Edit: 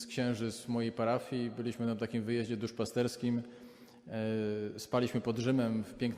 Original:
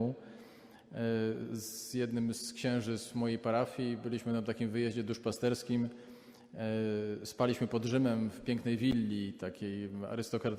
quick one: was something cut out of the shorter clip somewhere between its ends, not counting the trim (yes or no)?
no